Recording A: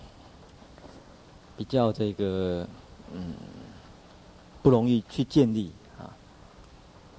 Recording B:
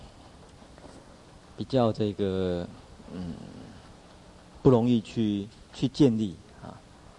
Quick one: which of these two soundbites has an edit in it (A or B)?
A